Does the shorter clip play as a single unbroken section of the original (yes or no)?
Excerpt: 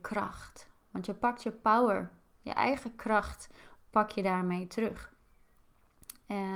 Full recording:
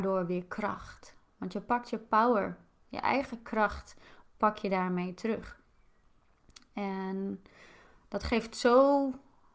yes